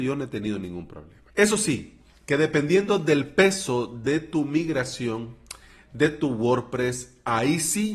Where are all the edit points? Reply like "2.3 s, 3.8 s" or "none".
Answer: 1.3 s